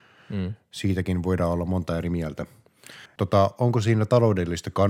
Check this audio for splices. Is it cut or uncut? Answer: cut